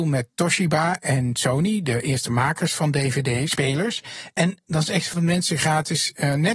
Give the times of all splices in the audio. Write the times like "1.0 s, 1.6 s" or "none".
5.1 s

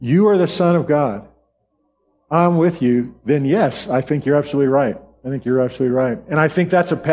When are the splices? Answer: none

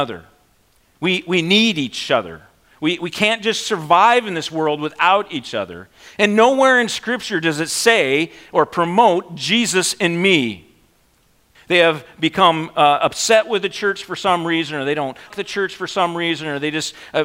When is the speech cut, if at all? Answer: 11.5 s, 15.3 s

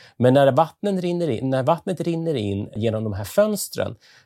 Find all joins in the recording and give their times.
2.8 s

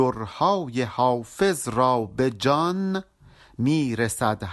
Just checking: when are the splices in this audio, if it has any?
none

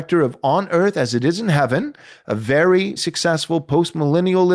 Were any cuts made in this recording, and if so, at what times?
3.0 s

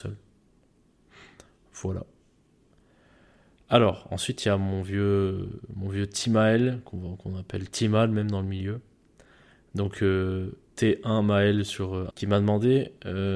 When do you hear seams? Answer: 12.1 s

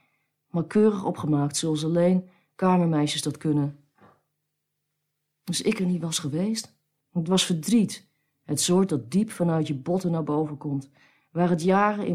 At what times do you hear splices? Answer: 7.0 s

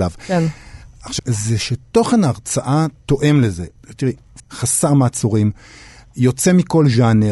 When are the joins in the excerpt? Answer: 1.2 s, 4.4 s

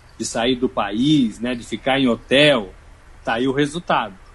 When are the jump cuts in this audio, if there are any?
none

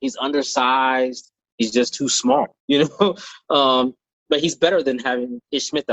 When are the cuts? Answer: 1.5 s, 2.6 s

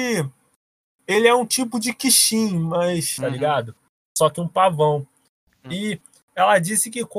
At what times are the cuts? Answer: 3.2 s

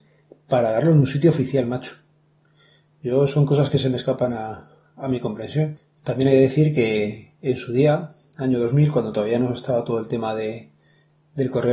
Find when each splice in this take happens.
none

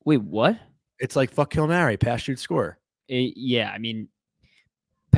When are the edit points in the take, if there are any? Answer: 3.0 s

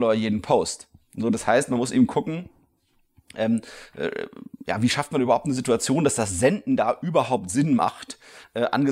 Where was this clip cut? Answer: none

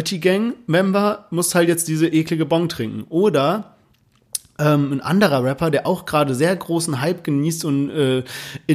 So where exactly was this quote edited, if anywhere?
none

